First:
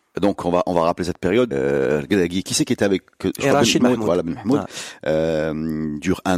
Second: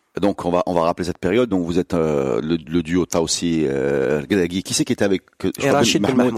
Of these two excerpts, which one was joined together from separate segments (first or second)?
first